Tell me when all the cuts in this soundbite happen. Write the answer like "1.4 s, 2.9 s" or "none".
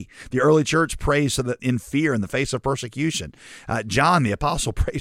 1.6 s